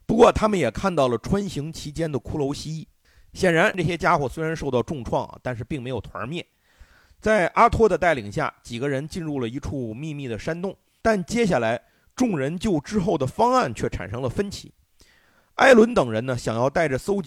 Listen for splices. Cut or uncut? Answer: cut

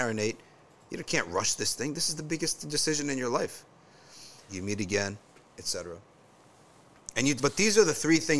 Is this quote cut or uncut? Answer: cut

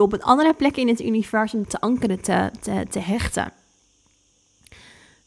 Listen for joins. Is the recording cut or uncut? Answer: cut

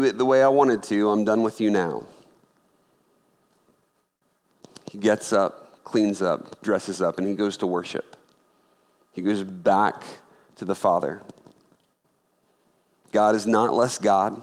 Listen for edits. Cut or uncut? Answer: uncut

